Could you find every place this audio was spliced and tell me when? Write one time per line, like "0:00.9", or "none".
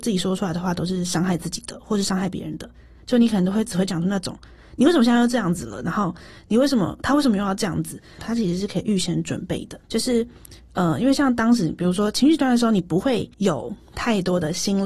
0:08.2
0:09.8
0:13.3

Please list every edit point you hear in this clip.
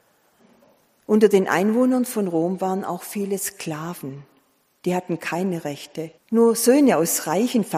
0:06.2

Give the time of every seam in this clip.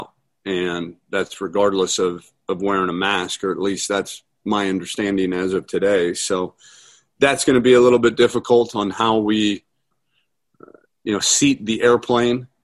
0:09.9

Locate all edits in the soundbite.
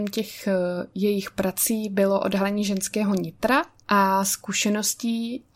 none

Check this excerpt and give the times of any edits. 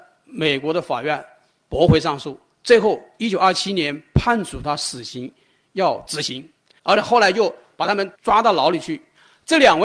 0:06.8
0:08.1

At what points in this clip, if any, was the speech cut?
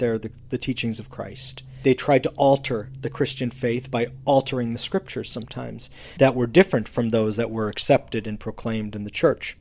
0:06.2

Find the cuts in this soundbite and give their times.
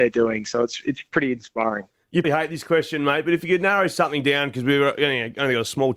0:02.2

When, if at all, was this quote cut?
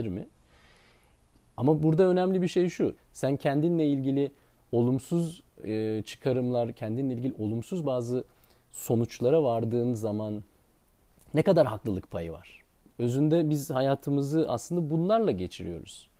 0:03.0
0:12.9

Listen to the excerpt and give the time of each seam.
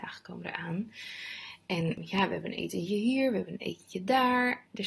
none

